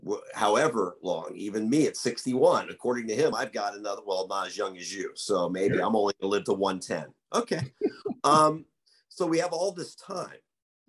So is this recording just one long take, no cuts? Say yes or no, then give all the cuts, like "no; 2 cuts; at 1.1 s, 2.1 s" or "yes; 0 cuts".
yes; 0 cuts